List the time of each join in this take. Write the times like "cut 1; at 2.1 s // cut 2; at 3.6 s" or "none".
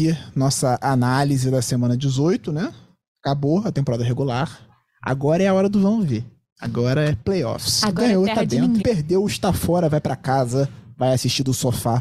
cut 1; at 8.8 s